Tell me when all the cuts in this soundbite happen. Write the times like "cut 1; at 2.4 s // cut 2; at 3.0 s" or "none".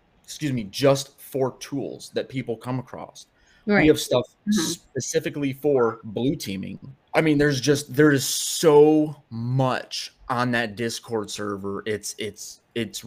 cut 1; at 7.1 s